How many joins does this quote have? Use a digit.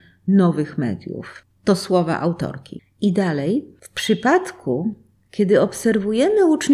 0